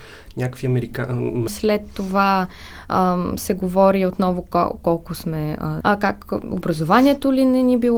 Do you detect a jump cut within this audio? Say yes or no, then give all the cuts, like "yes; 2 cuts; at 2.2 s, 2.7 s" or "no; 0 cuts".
yes; 2 cuts; at 1.5 s, 5.8 s